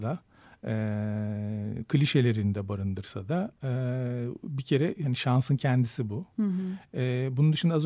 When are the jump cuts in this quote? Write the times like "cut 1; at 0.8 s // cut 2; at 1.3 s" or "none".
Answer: none

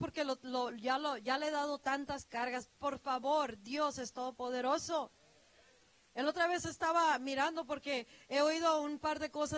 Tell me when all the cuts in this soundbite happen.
none

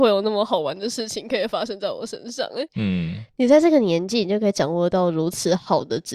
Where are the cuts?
cut 1; at 2.7 s

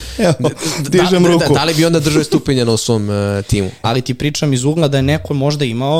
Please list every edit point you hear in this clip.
cut 1; at 3.8 s

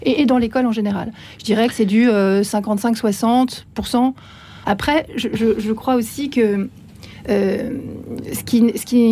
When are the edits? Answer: cut 1; at 4.6 s

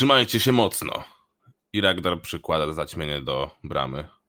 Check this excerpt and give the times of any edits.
none

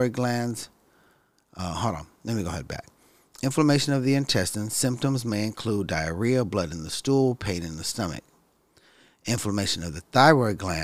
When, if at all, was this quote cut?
none

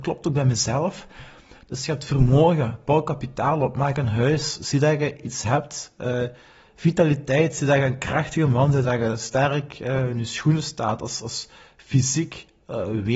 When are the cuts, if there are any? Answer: cut 1; at 8.8 s

